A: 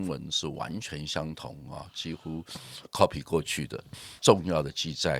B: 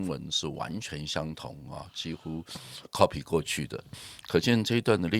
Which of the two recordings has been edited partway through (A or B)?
A